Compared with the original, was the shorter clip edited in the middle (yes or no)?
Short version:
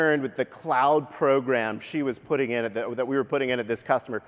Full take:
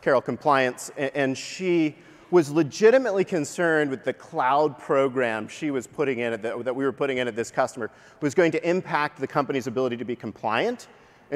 no